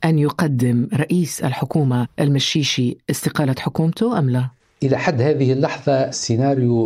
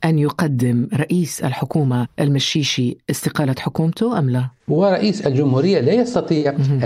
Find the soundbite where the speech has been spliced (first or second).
second